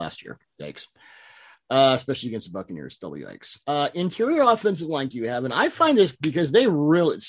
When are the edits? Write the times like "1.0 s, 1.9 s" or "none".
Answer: 5.1 s